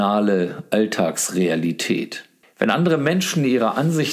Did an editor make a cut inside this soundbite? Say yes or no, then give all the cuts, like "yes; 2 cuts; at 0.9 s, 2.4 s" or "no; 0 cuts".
yes; 1 cut; at 2.4 s